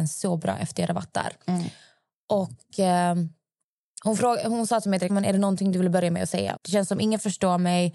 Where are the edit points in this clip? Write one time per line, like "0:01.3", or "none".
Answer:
0:05.1
0:06.6